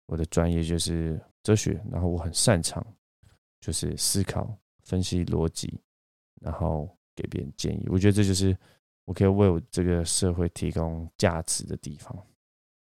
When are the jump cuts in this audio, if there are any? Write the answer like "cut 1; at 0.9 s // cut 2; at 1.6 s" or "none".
cut 1; at 1.3 s